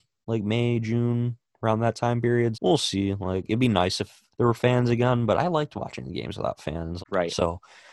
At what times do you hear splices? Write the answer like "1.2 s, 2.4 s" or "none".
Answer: 2.5 s, 4.3 s, 7.0 s